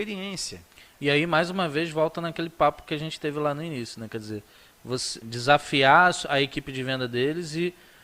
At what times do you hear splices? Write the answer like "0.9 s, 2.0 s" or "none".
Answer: 5.2 s